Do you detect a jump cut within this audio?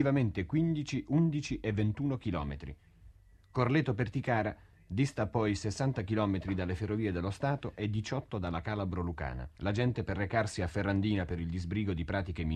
yes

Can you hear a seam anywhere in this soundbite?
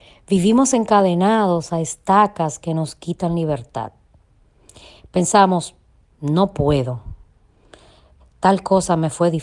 no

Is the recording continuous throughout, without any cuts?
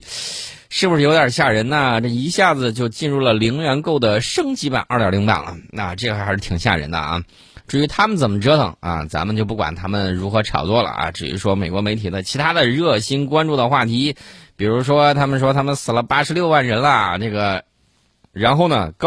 yes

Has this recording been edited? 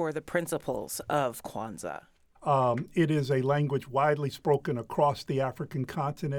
yes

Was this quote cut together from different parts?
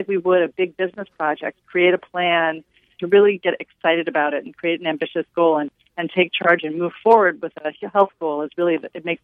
yes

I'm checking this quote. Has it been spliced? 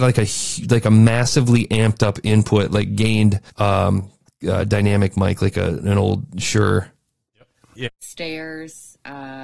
yes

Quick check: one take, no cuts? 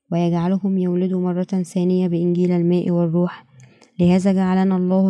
yes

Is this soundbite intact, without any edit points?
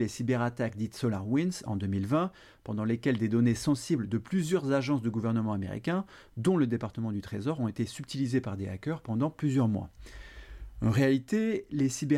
yes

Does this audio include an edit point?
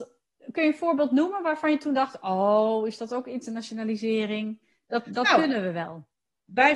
no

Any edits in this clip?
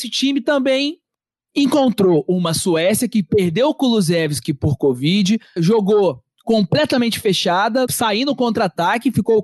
yes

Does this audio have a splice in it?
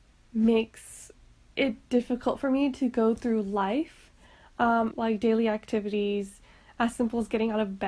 yes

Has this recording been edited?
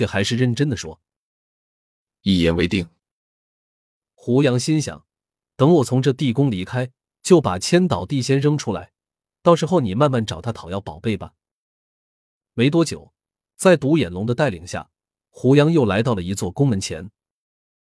no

